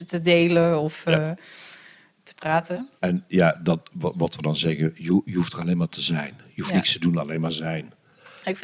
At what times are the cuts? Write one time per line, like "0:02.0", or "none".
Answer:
0:03.0